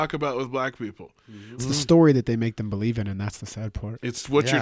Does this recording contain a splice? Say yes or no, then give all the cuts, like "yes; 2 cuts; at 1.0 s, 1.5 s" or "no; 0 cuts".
yes; 1 cut; at 1.6 s